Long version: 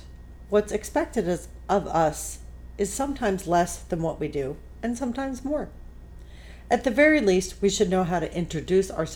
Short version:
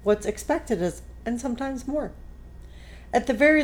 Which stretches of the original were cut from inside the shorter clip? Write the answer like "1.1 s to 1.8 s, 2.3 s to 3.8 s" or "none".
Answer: 1.7 s to 4.8 s